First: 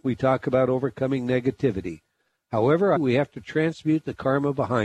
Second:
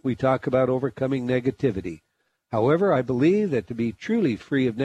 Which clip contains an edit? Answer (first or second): first